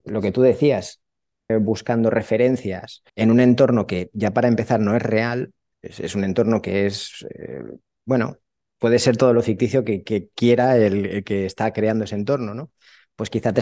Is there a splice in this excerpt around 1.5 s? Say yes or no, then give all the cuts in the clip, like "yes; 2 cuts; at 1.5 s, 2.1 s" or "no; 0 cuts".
yes; 2 cuts; at 1.5 s, 3.1 s